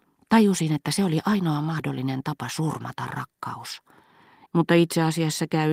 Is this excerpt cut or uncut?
cut